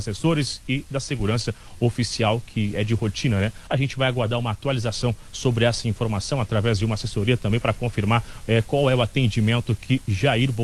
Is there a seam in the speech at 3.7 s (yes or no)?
yes